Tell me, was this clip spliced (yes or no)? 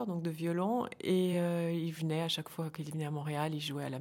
no